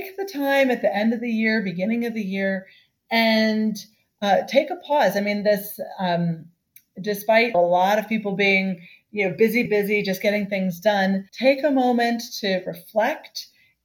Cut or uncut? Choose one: cut